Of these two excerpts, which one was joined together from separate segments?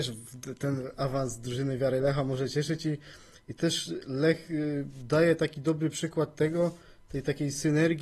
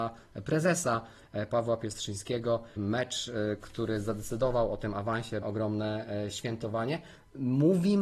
second; 2 cuts; at 2.8 s, 5.4 s

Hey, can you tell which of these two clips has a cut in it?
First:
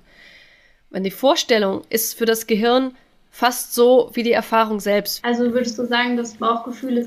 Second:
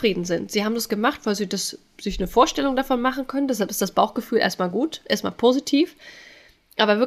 first; 1 cut; at 5.2 s

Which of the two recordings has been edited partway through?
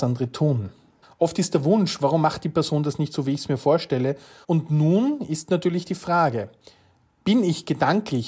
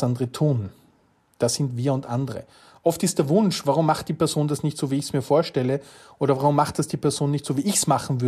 first; 2 cuts; at 1.0 s, 4.4 s

